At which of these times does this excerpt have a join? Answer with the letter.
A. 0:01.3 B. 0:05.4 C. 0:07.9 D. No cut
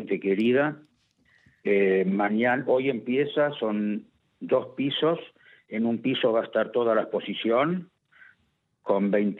D